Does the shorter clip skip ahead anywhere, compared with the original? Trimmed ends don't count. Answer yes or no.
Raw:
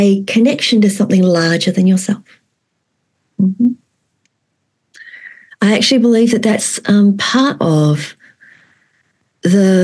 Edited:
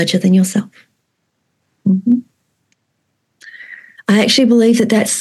no